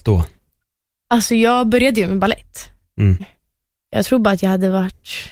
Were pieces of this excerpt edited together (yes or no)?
yes